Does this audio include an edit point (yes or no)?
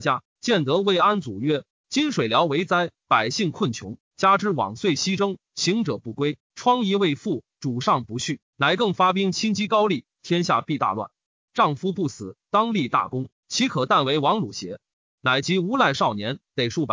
yes